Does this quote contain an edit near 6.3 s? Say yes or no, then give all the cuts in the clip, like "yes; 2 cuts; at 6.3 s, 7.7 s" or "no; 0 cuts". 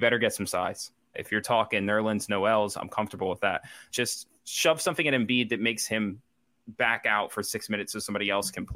no; 2 cuts; at 1.1 s, 3.9 s